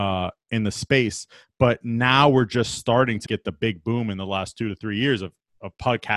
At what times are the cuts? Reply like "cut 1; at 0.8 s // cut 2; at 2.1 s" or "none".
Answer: cut 1; at 3.3 s